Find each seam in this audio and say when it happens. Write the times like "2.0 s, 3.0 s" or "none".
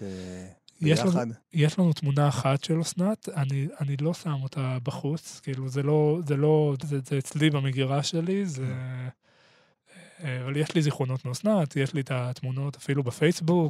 6.8 s